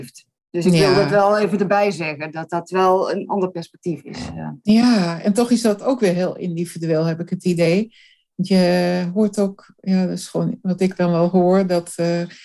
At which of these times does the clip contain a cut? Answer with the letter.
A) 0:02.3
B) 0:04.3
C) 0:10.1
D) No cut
D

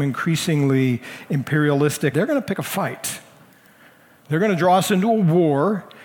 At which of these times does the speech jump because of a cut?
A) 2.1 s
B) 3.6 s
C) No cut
A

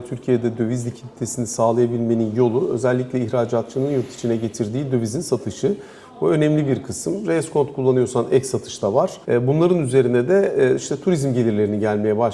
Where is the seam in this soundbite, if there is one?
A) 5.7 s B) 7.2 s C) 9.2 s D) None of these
C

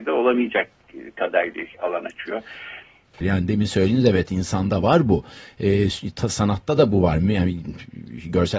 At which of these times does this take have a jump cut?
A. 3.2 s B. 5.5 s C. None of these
A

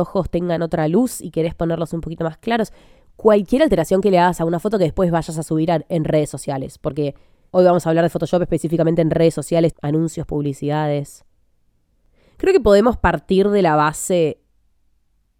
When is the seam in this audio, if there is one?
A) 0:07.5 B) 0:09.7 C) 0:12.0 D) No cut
B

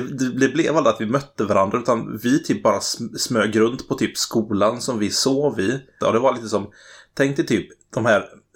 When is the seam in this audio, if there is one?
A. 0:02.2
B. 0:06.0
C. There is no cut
B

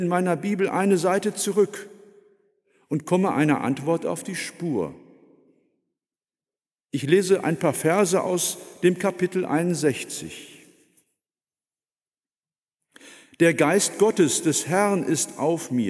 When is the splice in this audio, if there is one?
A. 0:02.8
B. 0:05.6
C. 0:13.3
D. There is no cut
D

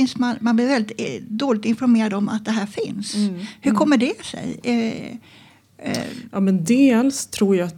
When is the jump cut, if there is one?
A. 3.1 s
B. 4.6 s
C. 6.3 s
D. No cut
D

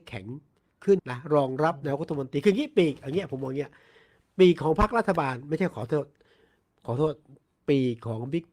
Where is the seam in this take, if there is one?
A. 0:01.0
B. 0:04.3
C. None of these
A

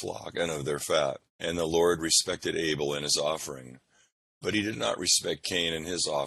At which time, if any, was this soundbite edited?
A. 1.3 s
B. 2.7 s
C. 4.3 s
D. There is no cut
A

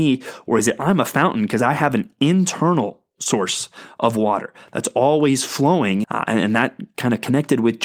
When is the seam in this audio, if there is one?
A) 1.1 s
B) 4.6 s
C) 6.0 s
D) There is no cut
C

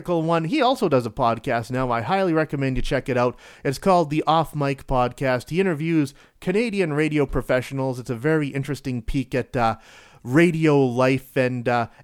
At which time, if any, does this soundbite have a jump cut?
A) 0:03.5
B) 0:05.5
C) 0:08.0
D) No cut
D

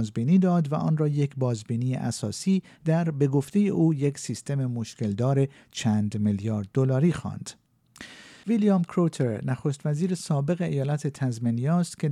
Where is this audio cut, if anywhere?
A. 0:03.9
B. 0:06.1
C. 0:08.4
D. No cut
C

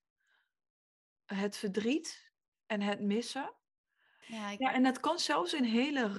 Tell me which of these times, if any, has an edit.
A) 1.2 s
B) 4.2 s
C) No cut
B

